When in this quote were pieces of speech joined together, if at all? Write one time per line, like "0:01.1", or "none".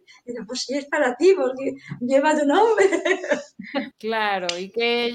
0:03.9